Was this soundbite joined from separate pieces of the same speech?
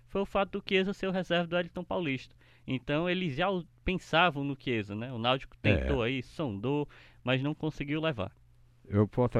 no; 0 cuts

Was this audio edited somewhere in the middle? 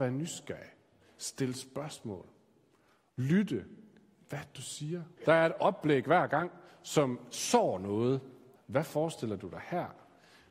yes; 2 cuts; at 5.2 s, 8.6 s

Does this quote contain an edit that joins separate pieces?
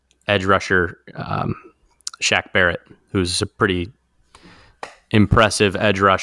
no; 0 cuts

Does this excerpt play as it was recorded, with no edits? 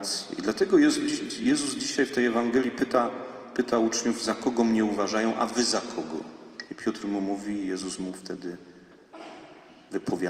no; 1 cut; at 6.7 s

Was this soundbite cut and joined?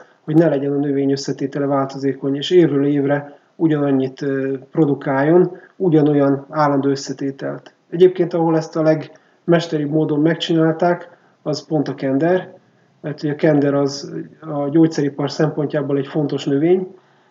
no; 0 cuts

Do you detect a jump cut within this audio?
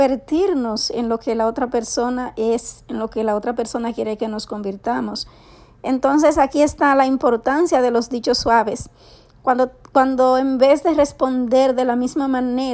no; 0 cuts

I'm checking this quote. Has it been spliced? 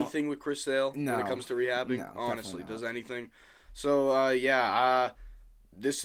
no; 0 cuts

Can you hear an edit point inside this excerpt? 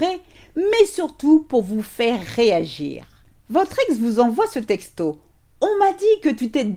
no; 0 cuts

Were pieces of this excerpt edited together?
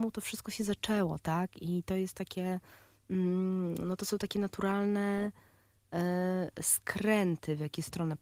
no; 0 cuts

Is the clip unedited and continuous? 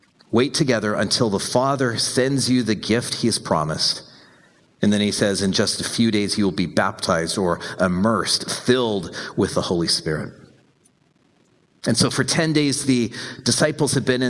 yes; 0 cuts

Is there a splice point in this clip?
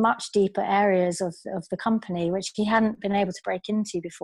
no; 0 cuts

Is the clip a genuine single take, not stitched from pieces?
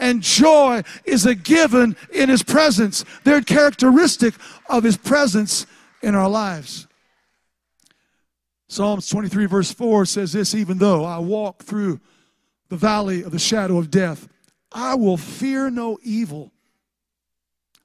no; 1 cut; at 3.4 s

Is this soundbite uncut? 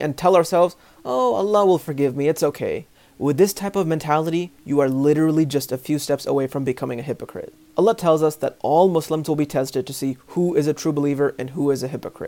yes; 0 cuts

